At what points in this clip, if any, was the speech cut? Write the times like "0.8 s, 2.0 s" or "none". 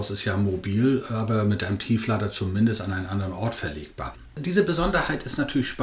none

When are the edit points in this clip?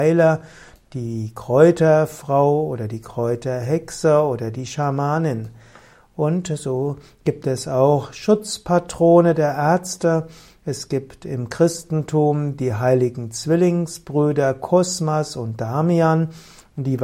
none

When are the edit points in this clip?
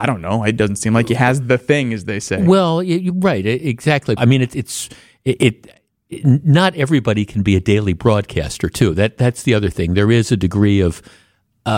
4.2 s

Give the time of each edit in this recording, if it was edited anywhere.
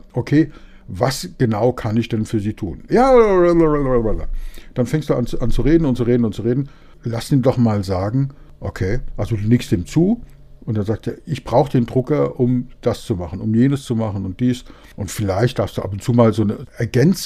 2.9 s

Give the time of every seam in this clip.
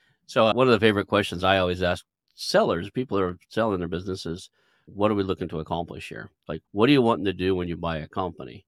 6.5 s

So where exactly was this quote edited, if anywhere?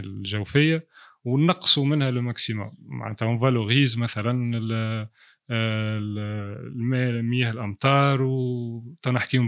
none

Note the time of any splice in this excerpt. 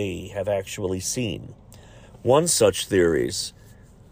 none

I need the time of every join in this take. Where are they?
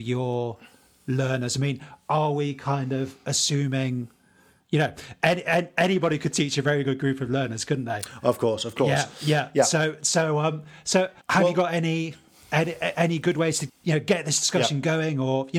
11.2 s, 13.7 s

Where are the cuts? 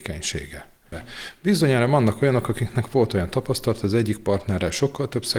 0.9 s

